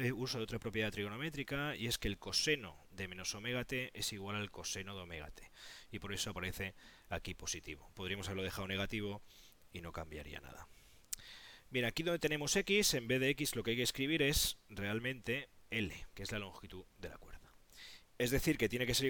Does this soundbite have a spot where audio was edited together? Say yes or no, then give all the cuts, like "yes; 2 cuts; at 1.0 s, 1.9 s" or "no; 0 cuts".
yes; 1 cut; at 18.1 s